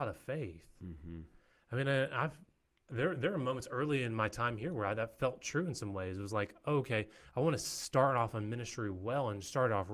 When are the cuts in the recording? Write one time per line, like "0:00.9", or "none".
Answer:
none

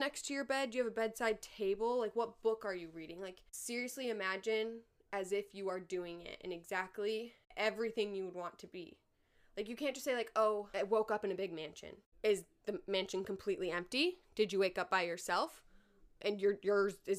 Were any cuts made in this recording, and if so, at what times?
0:16.2

